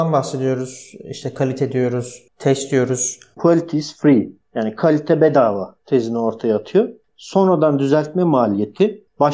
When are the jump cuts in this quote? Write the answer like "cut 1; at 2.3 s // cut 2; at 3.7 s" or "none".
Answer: cut 1; at 3.4 s // cut 2; at 7.1 s